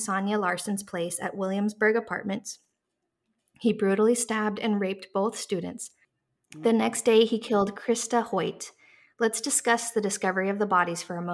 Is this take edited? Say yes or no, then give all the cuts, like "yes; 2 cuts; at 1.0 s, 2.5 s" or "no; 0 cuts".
no; 0 cuts